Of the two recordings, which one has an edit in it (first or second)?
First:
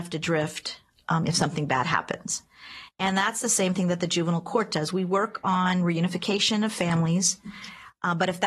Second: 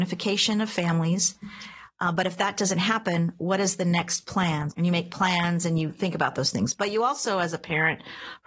second